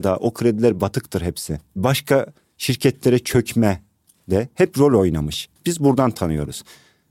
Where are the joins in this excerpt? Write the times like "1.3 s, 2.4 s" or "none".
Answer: 5.6 s